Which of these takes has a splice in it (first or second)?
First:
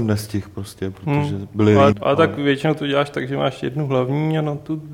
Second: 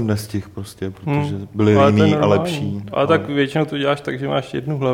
first